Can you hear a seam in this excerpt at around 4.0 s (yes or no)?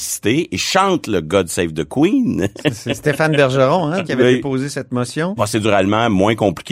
yes